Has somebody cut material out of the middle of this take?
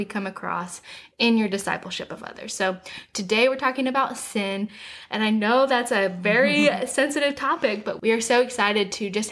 no; 0 cuts

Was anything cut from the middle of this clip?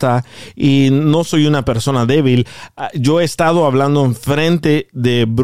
no; 0 cuts

